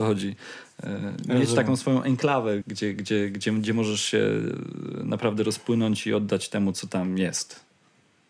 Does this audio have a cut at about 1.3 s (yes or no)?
no